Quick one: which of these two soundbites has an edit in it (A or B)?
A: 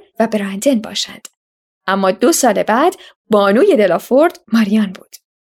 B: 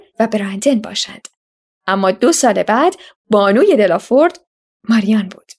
A